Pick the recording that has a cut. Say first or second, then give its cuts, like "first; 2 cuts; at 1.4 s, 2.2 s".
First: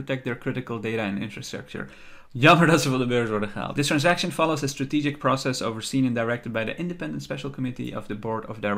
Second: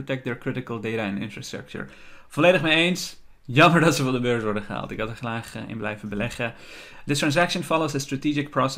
first; 2 cuts; at 2.3 s, 3.7 s